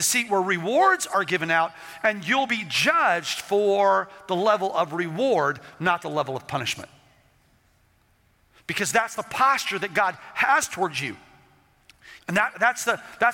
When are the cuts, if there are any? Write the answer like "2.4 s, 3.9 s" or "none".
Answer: 12.2 s